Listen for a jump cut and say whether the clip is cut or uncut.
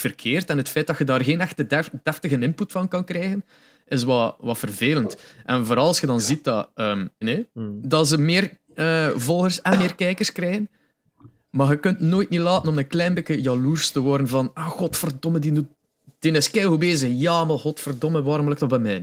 cut